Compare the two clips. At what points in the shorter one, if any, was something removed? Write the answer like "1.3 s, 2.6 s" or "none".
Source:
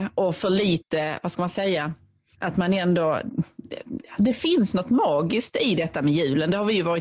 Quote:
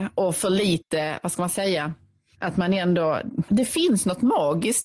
3.5 s